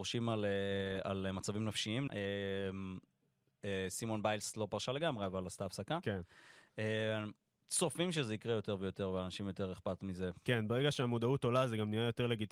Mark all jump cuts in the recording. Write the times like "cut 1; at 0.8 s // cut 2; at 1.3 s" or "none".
cut 1; at 2.1 s

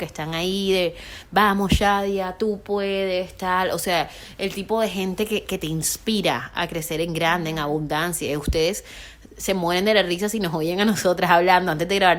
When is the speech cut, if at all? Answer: none

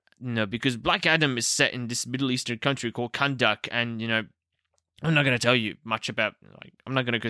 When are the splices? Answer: none

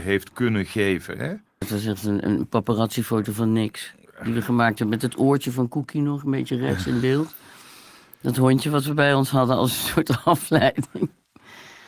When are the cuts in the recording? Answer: cut 1; at 1.6 s

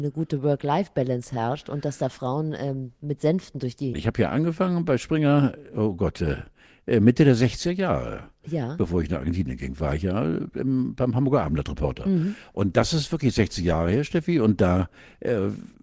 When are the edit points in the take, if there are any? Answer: cut 1; at 3.9 s

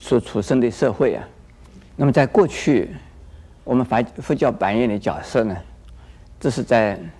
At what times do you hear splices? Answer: cut 1; at 1.9 s

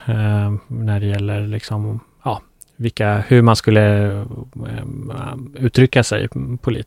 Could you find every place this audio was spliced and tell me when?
none

